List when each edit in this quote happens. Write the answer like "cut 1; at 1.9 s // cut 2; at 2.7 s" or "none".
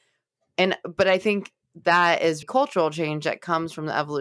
cut 1; at 2.4 s